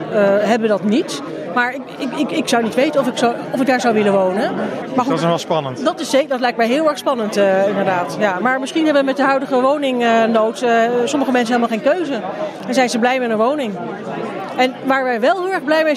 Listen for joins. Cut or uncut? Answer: uncut